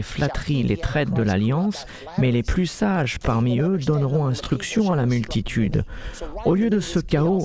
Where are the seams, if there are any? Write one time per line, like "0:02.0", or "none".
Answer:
none